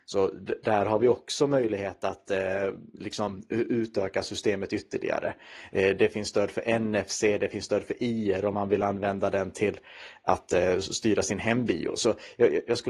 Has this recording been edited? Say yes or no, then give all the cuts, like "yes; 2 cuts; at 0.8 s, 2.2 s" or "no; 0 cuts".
no; 0 cuts